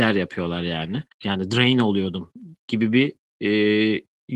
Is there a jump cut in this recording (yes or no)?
yes